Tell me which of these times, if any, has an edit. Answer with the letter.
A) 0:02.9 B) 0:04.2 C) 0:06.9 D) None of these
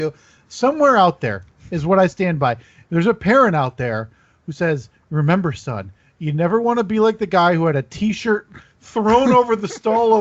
D